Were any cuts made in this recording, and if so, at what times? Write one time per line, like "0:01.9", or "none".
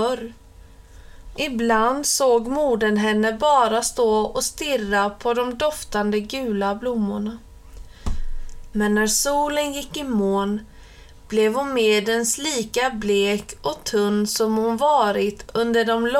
0:01.4
0:08.7